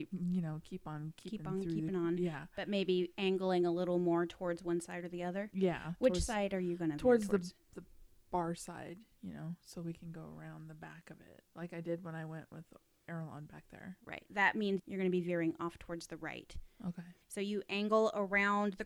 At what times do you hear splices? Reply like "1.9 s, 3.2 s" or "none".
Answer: 17.2 s